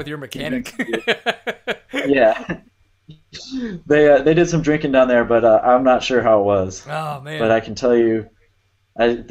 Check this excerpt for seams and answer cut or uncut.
uncut